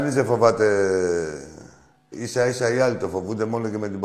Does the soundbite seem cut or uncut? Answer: cut